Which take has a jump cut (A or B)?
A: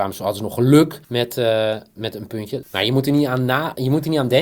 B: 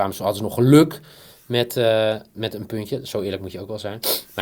A